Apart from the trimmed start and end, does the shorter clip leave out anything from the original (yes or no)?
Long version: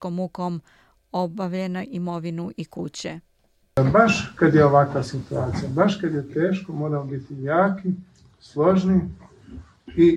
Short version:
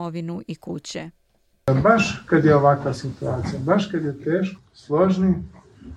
yes